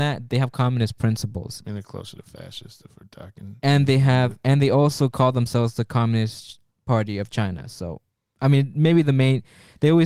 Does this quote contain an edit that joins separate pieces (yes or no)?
no